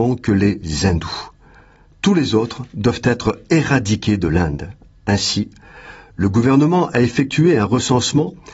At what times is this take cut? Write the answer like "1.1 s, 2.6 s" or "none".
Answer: none